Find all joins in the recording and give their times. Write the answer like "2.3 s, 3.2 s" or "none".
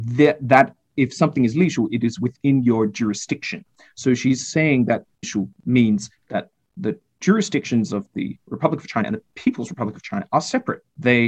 5.2 s